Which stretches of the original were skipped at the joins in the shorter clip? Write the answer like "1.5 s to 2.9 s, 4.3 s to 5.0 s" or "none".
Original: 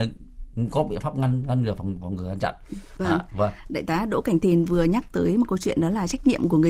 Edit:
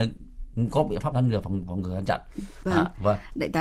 1.1 s to 1.4 s